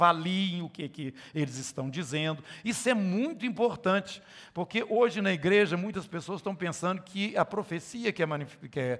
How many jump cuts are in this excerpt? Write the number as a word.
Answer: zero